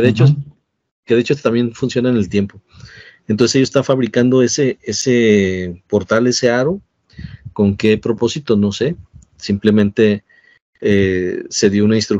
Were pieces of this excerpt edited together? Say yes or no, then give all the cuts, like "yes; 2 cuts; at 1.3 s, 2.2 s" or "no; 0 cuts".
no; 0 cuts